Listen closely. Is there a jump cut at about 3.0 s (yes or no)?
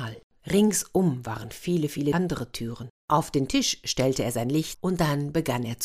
yes